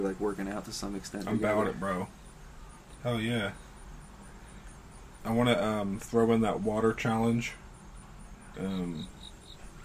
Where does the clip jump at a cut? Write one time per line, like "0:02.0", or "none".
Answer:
0:05.2
0:08.5